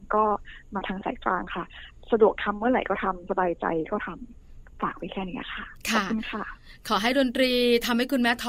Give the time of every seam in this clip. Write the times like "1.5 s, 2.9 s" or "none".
none